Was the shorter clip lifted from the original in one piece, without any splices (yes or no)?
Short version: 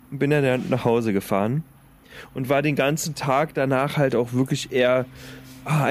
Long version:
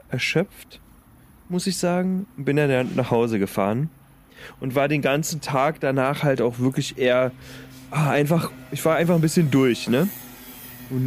yes